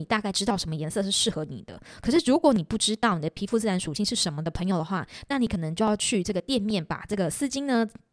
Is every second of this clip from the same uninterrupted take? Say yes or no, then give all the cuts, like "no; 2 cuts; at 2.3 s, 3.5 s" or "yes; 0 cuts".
yes; 0 cuts